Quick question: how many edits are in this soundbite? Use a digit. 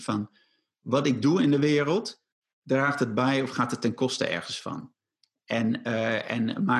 0